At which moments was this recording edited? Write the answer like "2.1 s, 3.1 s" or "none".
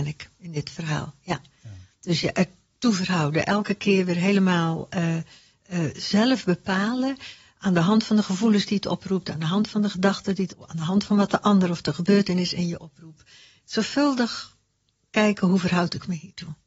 none